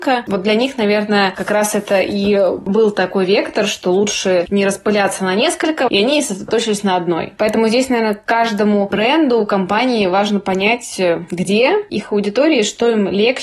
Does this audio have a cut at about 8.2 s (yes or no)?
no